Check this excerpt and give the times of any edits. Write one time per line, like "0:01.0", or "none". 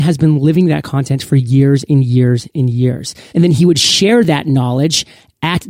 0:03.3